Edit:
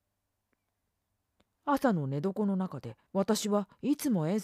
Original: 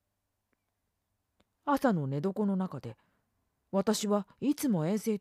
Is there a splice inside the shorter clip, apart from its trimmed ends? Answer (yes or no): yes